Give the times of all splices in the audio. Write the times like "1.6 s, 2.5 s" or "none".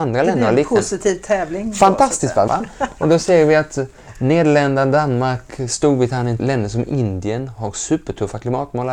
2.5 s, 6.4 s

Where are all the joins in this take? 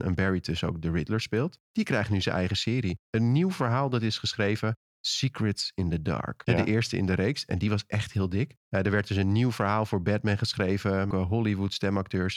6.5 s, 11.1 s

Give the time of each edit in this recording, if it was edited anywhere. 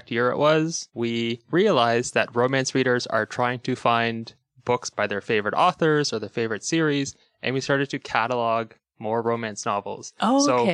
0.9 s

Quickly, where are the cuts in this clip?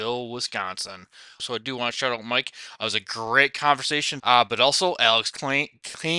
1.4 s, 4.2 s

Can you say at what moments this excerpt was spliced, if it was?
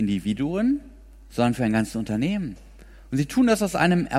3.0 s

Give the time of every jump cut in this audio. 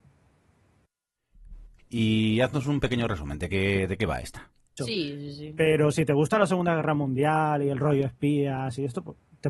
1.8 s, 4.8 s

